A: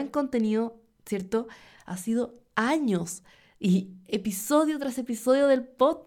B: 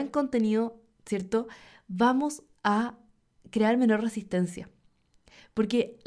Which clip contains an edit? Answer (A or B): A